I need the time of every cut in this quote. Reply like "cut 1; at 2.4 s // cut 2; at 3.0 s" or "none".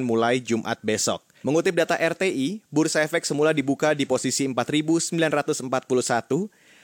cut 1; at 1.4 s